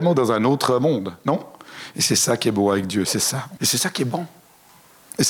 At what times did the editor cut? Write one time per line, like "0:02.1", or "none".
0:03.6